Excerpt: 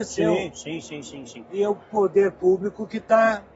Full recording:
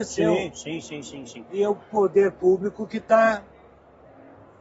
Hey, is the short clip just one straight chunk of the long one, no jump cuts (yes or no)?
yes